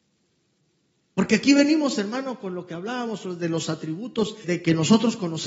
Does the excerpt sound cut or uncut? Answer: cut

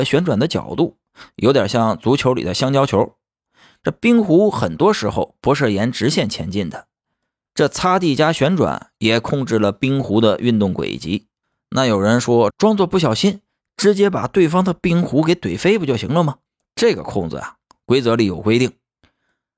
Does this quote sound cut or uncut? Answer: cut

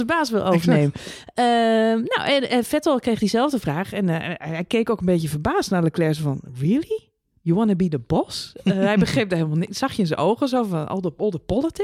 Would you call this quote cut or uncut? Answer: uncut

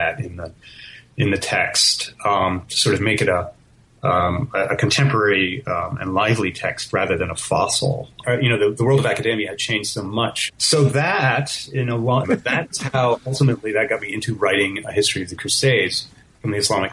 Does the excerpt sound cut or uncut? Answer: cut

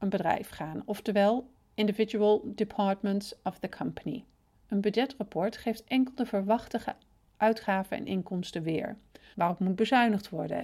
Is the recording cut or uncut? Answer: cut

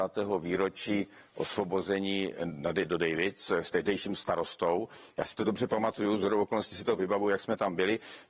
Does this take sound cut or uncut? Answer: uncut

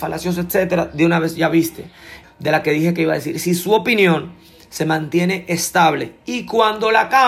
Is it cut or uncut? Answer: cut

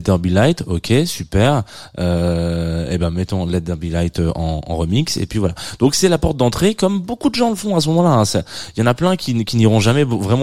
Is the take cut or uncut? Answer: uncut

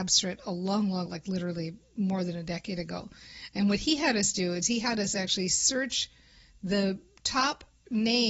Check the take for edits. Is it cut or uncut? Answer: cut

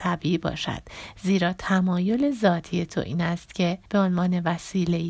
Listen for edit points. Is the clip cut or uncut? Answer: cut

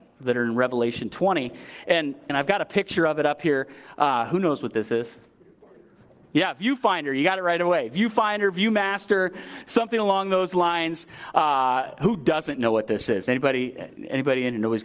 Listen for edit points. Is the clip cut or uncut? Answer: cut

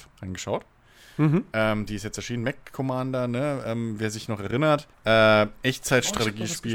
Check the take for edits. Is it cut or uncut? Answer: cut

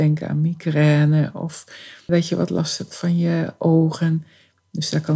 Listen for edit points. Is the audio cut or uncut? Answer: cut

